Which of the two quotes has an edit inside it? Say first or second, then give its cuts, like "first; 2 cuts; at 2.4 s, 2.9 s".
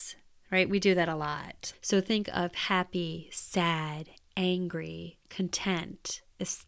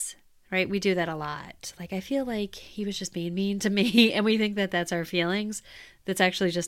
first; 1 cut; at 1.7 s